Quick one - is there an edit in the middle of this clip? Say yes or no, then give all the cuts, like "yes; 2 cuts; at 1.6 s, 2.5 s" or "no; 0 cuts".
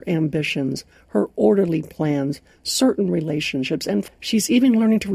yes; 1 cut; at 4.1 s